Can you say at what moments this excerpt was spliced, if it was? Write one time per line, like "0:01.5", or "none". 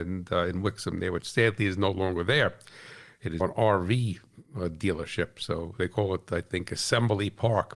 0:03.4